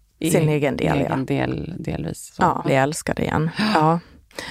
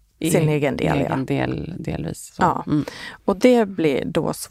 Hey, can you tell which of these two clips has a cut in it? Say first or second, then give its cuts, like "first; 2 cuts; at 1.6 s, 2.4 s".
first; 1 cut; at 2.6 s